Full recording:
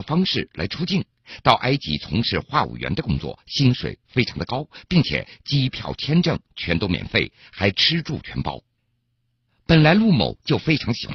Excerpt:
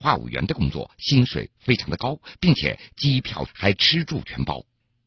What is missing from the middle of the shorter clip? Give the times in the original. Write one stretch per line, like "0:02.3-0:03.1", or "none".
0:06.0-0:07.4